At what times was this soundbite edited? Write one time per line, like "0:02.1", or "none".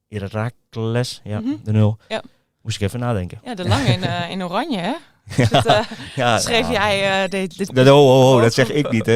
0:07.7

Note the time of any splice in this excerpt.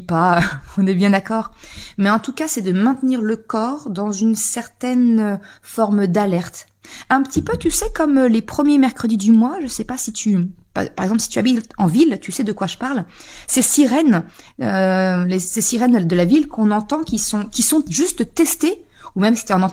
none

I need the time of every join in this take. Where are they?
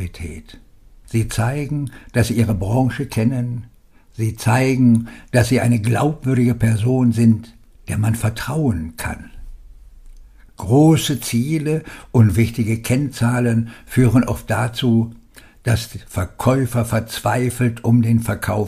0:01.0
0:10.5

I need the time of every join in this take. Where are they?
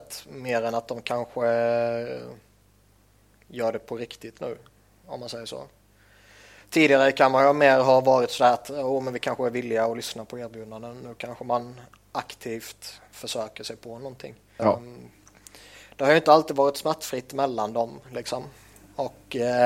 0:14.6

